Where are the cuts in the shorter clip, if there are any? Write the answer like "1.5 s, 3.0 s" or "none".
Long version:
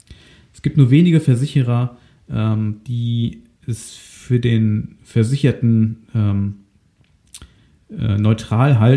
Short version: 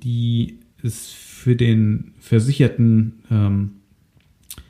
none